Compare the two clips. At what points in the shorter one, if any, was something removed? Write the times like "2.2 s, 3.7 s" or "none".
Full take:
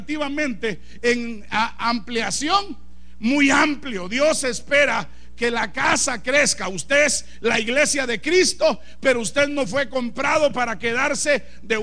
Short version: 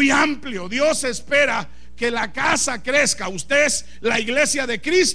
none